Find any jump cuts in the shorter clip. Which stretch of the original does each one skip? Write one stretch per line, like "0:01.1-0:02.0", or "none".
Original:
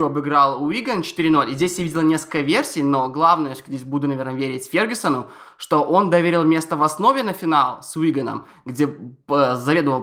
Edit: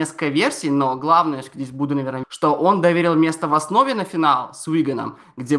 0:04.4-0:05.5

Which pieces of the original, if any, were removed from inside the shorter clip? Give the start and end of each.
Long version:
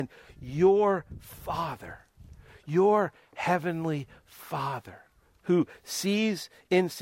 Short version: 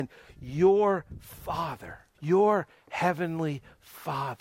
0:02.1-0:02.6

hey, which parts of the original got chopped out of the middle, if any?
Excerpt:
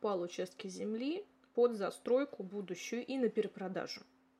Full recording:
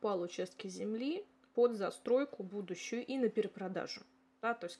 none

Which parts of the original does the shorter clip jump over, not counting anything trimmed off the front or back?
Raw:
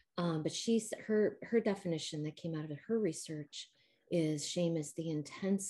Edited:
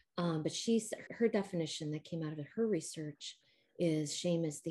0:01.1-0:01.4

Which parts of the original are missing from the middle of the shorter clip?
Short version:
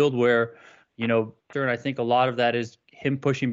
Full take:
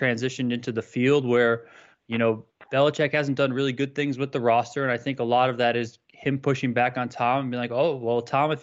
0:02.6-0:04.7

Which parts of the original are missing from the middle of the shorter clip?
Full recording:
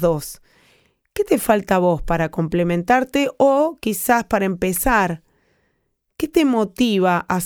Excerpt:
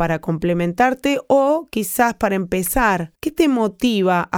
0:05.2-0:06.1

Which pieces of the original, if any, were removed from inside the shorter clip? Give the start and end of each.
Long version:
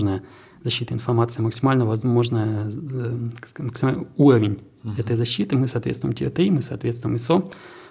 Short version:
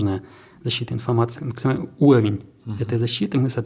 0:01.4-0:03.5

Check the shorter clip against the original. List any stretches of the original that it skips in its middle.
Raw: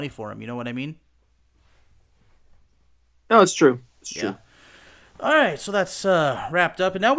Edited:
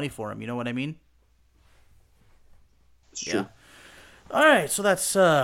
0:03.0-0:03.9

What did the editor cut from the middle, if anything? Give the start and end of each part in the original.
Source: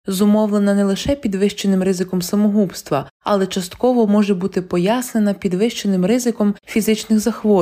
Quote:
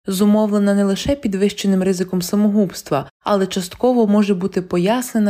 none

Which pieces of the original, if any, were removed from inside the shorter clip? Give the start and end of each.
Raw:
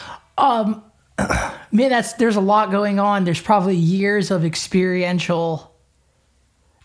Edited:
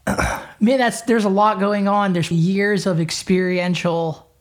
0:03.4-0:03.8

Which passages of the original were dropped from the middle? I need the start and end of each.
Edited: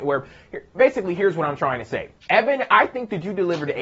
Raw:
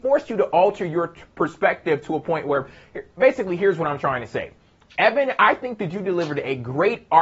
0:04.6-0:04.9

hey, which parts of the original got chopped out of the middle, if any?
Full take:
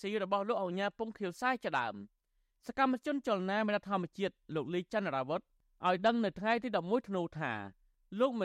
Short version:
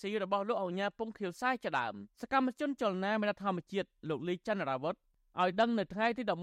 0:02.1-0:02.6

